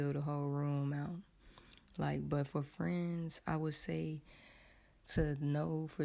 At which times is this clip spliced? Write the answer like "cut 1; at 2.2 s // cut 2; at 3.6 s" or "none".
none

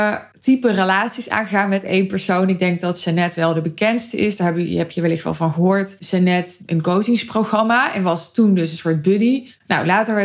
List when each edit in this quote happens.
cut 1; at 6.7 s

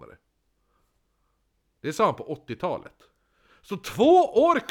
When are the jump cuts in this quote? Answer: none

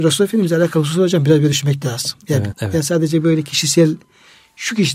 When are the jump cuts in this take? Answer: cut 1; at 2.5 s

